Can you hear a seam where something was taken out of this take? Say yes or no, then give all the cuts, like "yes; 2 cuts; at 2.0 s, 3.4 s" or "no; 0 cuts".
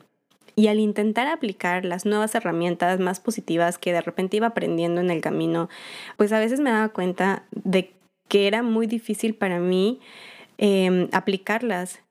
yes; 1 cut; at 6.2 s